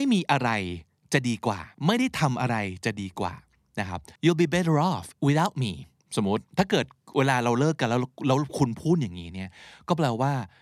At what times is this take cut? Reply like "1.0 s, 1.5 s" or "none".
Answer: 1.7 s, 4.2 s